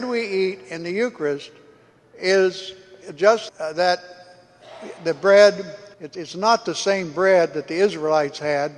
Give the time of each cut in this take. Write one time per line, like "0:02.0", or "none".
0:03.5
0:05.9